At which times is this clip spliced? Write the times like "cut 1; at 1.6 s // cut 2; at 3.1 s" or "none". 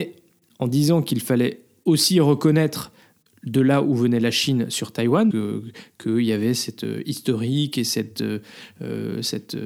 cut 1; at 5.3 s